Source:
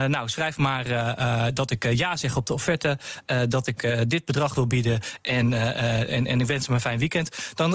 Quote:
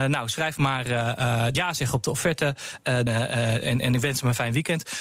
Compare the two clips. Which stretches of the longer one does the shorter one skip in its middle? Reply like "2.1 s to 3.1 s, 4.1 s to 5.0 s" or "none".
1.5 s to 2.0 s, 3.5 s to 5.5 s